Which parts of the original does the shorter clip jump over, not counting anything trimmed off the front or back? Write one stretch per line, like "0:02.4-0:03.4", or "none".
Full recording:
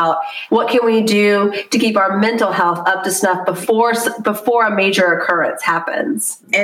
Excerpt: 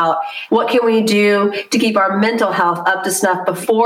none